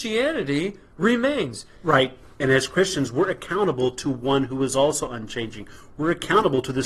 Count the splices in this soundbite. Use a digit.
1